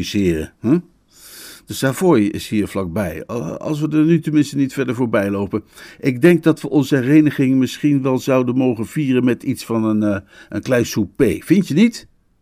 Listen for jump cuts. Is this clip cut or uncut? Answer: uncut